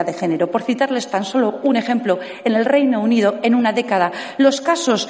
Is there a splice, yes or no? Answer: no